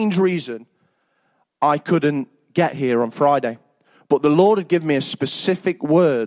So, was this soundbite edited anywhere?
no; 0 cuts

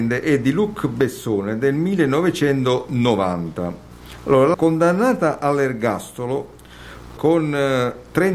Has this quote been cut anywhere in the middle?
yes; 2 cuts; at 4.5 s, 7.2 s

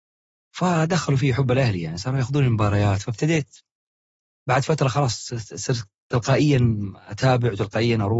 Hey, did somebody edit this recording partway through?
no; 0 cuts

